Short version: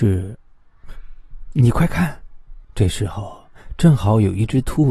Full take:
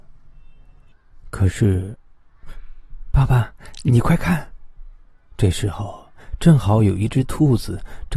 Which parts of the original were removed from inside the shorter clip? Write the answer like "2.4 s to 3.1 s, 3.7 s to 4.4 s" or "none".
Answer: 3.1 s to 3.8 s, 4.9 s to 5.3 s